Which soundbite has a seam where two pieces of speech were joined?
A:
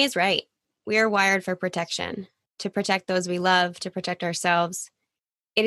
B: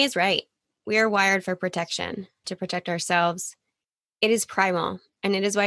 B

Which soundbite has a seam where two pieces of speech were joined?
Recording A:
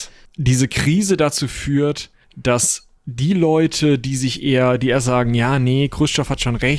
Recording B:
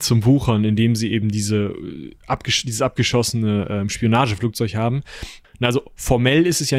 B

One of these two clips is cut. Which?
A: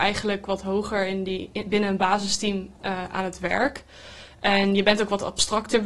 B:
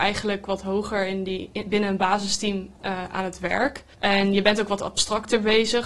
B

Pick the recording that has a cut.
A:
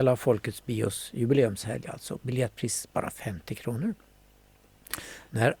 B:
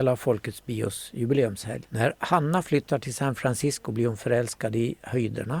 B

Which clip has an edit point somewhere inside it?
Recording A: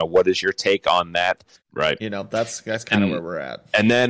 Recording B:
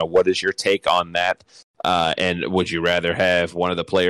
A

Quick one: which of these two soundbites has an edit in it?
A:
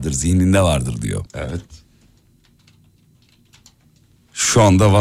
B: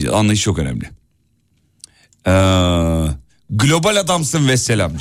A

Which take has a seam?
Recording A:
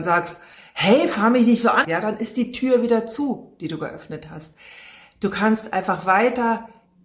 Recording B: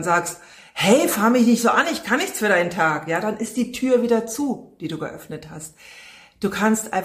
A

